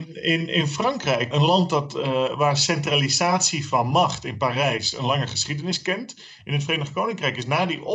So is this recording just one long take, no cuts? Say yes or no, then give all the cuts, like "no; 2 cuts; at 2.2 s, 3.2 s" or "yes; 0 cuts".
no; 2 cuts; at 1.3 s, 6.4 s